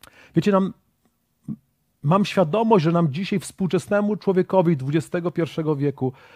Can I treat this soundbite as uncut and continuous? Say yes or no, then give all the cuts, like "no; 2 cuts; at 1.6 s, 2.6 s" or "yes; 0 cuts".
yes; 0 cuts